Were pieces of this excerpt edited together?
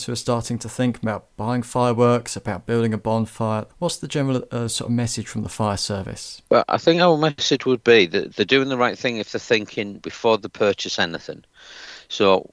yes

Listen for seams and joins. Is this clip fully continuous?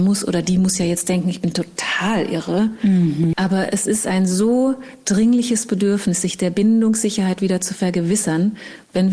no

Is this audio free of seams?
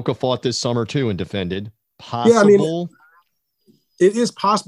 yes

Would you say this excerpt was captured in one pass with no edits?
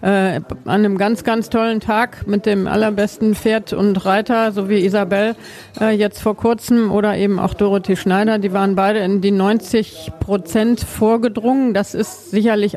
yes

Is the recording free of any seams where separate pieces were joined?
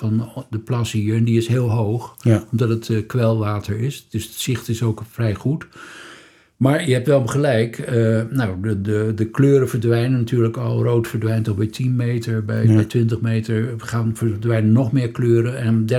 yes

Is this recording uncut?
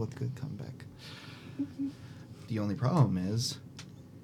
no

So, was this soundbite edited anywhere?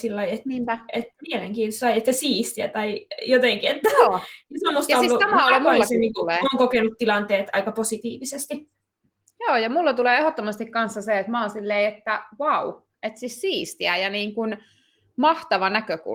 no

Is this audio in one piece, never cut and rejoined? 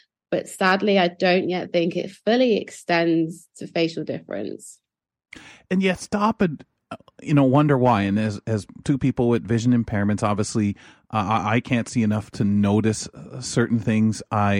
yes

